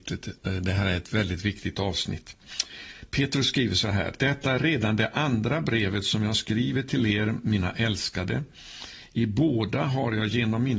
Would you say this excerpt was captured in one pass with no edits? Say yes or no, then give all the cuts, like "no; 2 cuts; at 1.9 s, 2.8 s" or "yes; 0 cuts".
yes; 0 cuts